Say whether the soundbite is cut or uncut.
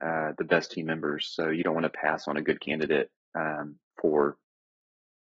uncut